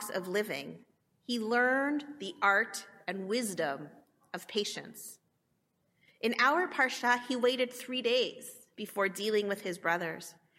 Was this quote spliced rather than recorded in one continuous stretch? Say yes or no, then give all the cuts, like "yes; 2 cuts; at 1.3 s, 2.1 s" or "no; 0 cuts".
no; 0 cuts